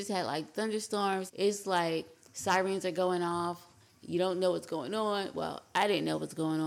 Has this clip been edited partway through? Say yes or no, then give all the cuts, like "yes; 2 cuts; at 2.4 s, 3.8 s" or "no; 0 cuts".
yes; 1 cut; at 1.3 s